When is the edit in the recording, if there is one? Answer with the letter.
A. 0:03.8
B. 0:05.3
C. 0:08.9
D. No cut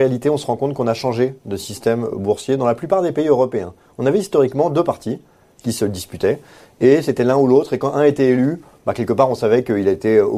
D